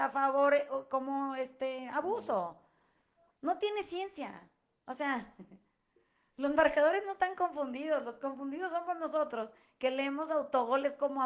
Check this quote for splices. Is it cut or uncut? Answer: cut